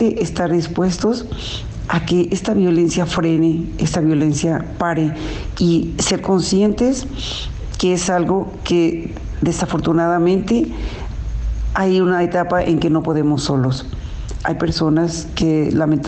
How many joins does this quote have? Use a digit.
1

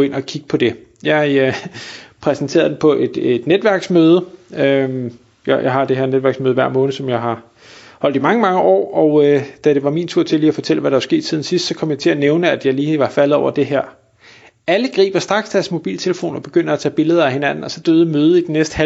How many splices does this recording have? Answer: 0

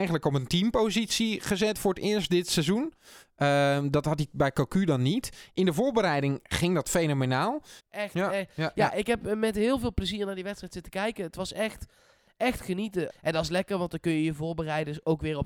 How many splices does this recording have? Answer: 2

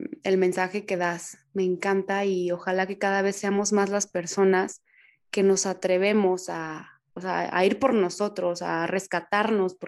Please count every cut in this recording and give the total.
1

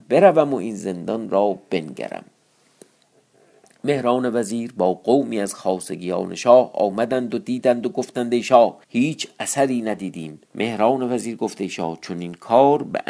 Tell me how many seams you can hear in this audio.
2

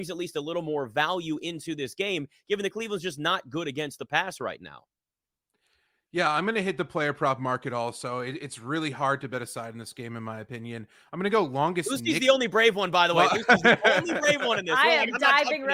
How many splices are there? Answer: 0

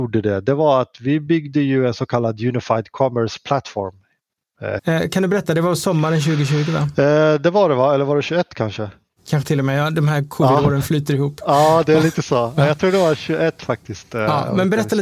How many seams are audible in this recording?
1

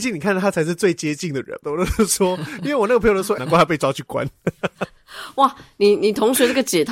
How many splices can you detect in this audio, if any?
2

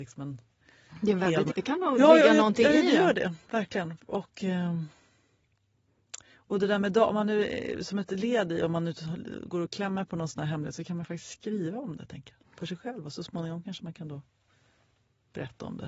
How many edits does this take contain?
1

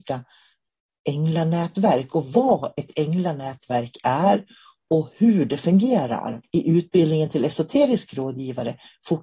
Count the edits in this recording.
1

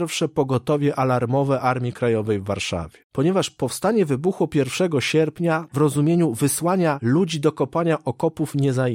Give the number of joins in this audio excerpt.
2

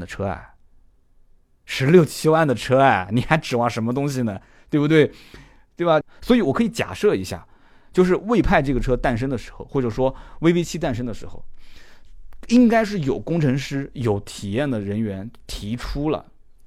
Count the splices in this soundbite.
1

